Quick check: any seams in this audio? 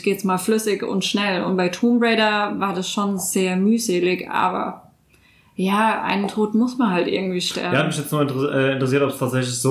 no; 0 cuts

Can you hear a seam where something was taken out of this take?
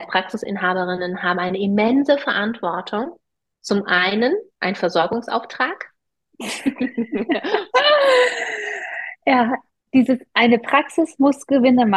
yes; 2 cuts; at 6.1 s, 9.8 s

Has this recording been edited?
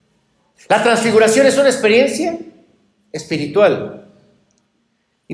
no; 0 cuts

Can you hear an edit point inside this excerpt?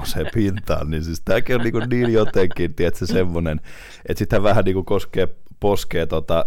no; 0 cuts

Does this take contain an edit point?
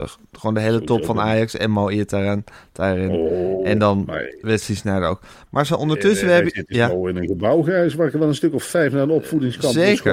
no; 0 cuts

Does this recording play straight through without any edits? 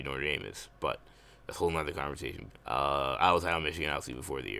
no; 1 cut; at 2.5 s

